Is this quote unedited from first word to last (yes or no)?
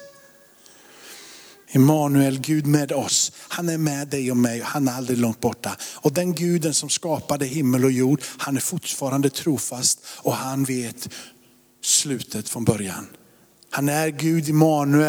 no